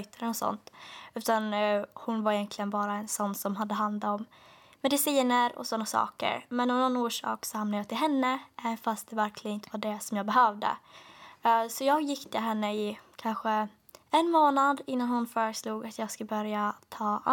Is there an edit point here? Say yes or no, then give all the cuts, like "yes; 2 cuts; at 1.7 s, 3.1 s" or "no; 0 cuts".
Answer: yes; 1 cut; at 14.0 s